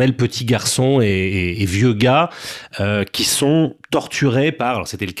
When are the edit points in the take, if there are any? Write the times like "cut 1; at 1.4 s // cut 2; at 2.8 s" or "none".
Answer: none